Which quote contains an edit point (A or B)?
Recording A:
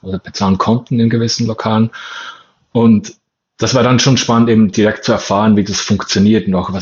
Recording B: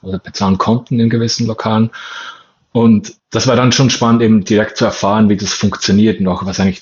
B